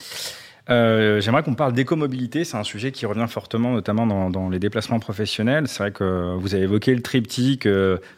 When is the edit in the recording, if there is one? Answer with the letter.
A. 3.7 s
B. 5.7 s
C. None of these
C